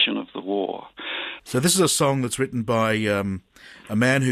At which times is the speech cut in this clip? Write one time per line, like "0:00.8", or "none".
0:01.4